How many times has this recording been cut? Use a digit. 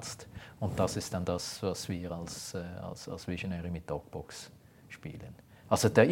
0